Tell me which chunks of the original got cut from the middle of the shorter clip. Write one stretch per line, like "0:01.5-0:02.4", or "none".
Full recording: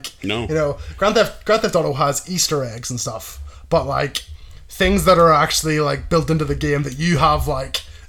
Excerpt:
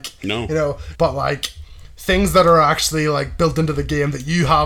0:00.9-0:03.7